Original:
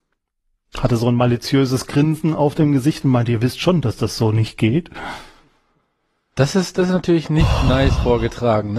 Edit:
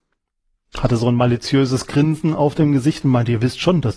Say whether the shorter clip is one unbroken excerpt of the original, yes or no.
yes